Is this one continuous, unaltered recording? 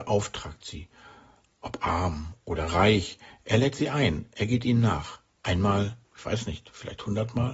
no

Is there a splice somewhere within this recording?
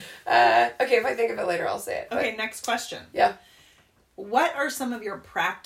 no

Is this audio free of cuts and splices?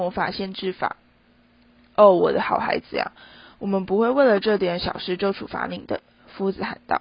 yes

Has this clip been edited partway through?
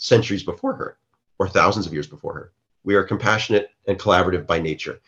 yes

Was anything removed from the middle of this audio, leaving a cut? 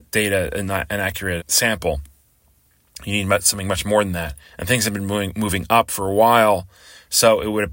yes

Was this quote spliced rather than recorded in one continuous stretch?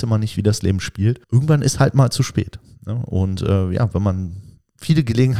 yes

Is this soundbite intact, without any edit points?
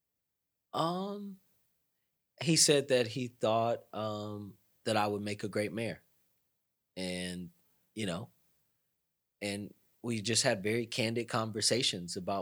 yes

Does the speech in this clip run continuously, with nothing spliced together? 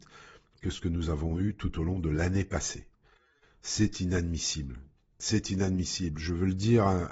yes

